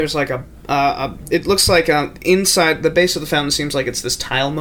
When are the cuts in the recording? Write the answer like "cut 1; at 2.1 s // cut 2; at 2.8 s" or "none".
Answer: none